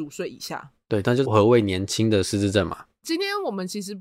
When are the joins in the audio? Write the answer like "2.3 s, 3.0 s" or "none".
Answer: 1.2 s, 3.0 s